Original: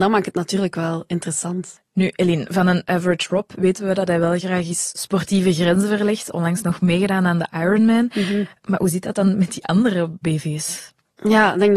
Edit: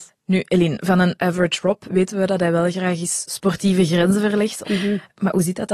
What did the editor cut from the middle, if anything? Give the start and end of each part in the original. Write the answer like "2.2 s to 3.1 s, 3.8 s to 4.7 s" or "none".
6.3 s to 8.1 s